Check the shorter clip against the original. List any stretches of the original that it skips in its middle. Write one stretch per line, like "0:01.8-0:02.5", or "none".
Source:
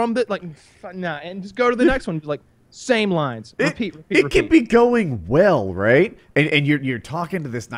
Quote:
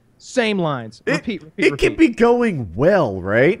none